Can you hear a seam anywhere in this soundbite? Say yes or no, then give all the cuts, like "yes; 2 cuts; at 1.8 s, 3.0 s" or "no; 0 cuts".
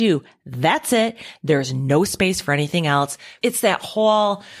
yes; 1 cut; at 3.4 s